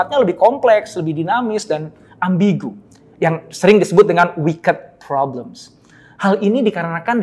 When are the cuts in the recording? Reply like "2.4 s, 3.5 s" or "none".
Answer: none